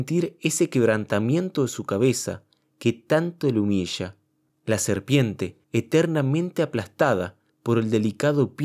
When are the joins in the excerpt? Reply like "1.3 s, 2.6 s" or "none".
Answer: 5.6 s, 7.5 s